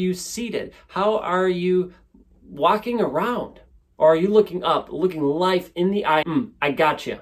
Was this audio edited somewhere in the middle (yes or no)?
yes